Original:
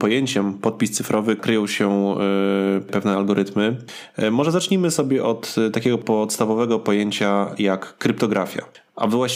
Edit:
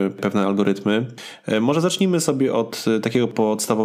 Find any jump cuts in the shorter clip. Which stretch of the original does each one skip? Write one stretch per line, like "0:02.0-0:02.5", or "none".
none